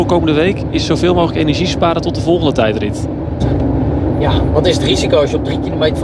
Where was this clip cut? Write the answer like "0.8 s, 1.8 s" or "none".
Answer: 3.4 s, 4.5 s